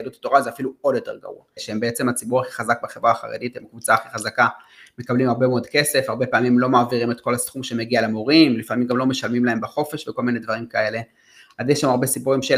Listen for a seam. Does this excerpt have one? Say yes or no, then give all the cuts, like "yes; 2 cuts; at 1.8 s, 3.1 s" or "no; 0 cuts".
yes; 1 cut; at 1.6 s